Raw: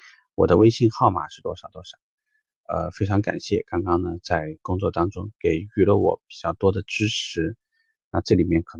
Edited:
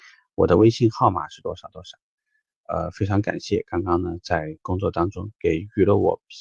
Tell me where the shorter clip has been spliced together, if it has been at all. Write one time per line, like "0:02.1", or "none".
none